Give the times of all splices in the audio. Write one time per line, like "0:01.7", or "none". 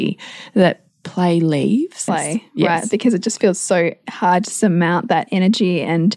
0:02.1